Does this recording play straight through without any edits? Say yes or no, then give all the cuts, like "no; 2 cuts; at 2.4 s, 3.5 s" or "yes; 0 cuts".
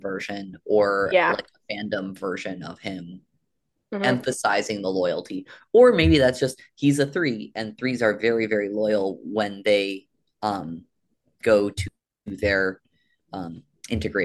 yes; 0 cuts